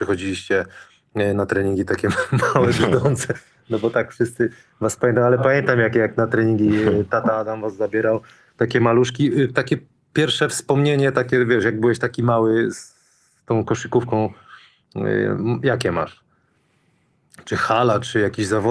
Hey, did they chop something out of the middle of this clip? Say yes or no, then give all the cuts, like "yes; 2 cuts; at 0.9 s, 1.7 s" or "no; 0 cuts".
no; 0 cuts